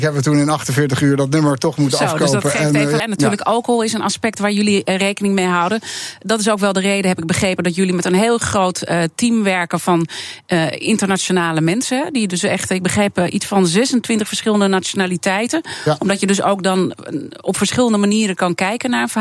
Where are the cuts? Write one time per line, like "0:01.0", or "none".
0:03.0

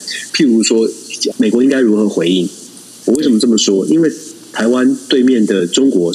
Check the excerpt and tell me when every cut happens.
0:01.3
0:03.0

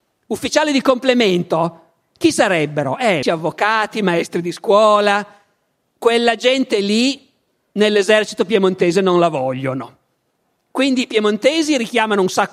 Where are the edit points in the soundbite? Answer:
0:03.2

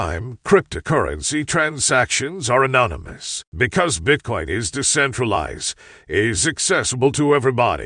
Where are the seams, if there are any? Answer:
0:03.5

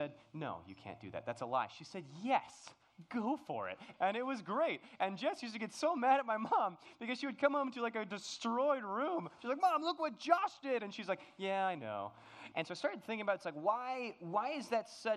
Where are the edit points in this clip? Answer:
0:03.9
0:12.5

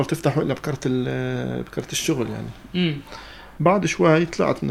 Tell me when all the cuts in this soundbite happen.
0:03.6

